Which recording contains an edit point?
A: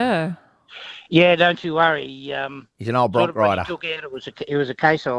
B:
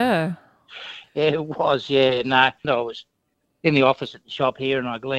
B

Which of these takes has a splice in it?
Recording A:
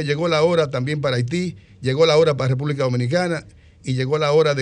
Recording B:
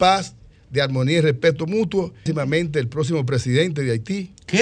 B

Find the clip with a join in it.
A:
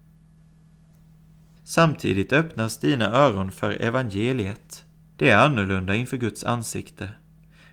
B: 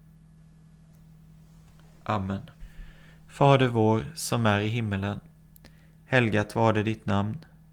A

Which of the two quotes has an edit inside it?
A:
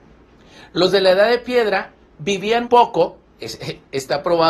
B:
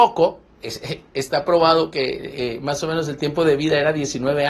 A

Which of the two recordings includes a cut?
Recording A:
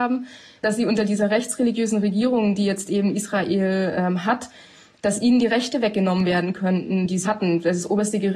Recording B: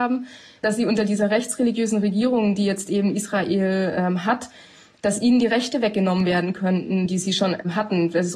A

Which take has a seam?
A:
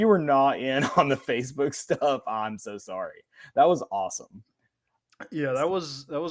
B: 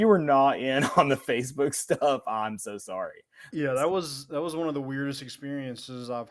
B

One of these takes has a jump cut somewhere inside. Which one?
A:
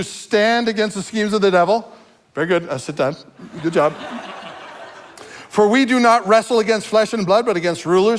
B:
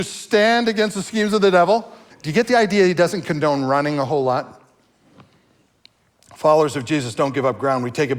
B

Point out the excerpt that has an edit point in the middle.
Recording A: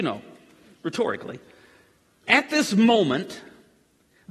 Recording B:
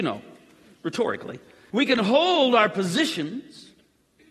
B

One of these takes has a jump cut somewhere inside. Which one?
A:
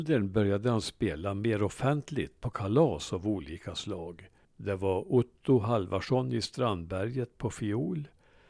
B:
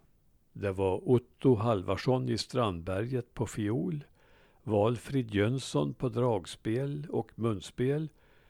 A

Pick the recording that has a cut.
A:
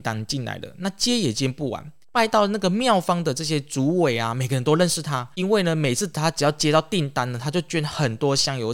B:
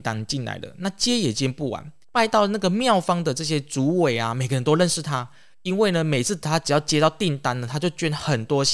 A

